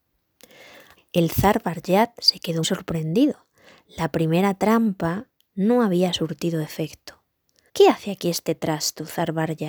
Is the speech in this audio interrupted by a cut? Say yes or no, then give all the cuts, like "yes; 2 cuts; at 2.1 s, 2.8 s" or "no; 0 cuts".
yes; 3 cuts; at 1.0 s, 2.6 s, 7.7 s